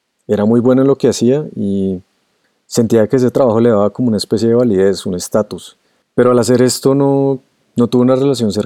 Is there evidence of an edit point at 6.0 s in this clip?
yes; 1 cut; at 6.0 s

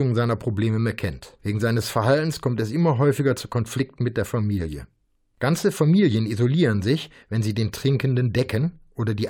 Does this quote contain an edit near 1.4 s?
yes; 1 cut; at 1.4 s

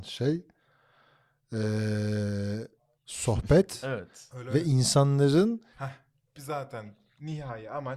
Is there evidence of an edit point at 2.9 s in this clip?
yes; 2 cuts; at 2.9 s, 5.7 s

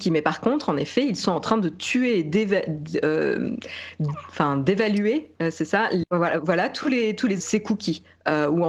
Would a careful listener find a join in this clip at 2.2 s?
no; 2 cuts; at 6.0 s, 7.4 s

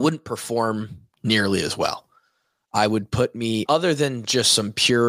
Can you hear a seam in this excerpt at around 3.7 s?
yes; 1 cut; at 3.7 s

